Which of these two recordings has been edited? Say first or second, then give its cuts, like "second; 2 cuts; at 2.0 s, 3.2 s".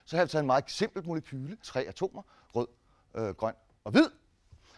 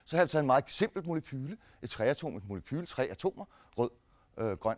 first; 1 cut; at 1.6 s